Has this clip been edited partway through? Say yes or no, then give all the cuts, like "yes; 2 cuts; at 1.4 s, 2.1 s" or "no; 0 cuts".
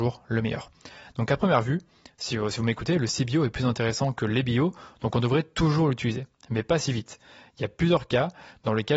no; 0 cuts